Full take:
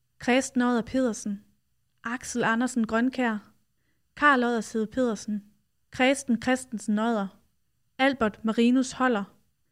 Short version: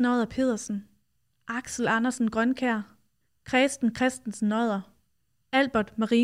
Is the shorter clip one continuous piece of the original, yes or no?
no